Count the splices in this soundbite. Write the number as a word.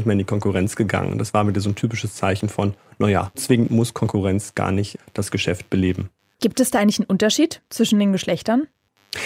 one